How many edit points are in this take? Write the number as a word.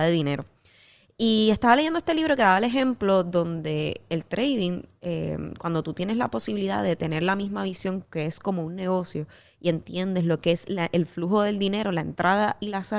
zero